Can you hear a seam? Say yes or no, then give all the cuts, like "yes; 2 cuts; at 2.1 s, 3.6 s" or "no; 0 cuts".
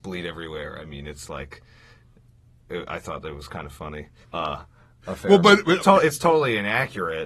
yes; 2 cuts; at 4.2 s, 5.8 s